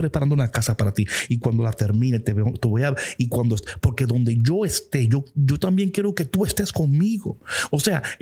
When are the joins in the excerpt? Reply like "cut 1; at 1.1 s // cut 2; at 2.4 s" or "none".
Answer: none